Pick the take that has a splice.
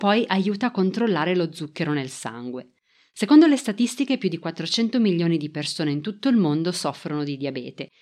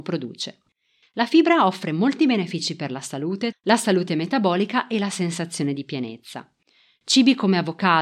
second; 2 cuts; at 1.0 s, 3.5 s

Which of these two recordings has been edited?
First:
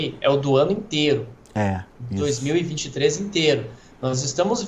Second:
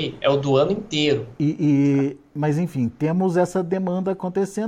second; 1 cut; at 1.4 s

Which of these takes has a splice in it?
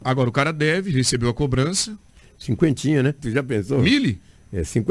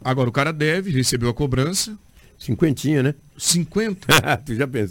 first; 1 cut; at 3.2 s

